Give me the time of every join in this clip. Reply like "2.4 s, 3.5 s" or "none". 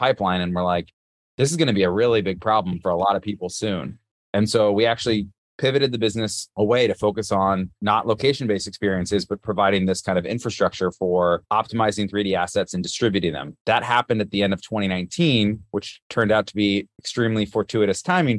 none